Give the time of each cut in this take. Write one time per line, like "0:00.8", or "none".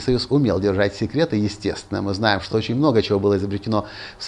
none